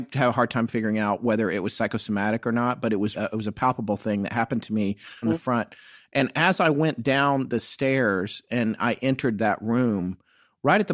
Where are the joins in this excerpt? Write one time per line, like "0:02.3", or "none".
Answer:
0:03.1
0:05.2